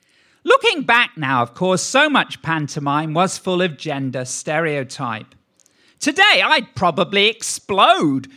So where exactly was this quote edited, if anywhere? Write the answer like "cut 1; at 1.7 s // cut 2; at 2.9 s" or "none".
none